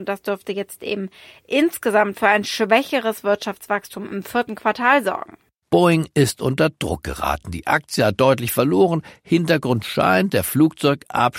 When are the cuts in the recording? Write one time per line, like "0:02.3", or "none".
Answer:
none